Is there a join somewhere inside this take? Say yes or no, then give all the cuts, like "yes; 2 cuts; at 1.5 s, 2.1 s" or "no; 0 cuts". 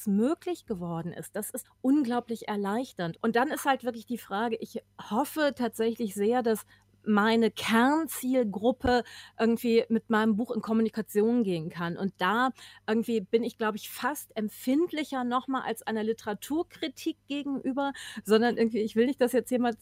yes; 2 cuts; at 1.6 s, 3.1 s